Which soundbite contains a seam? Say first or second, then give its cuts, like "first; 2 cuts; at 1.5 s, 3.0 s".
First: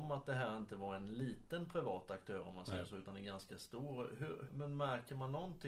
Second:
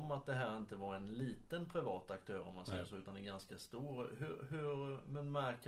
first; 1 cut; at 4.5 s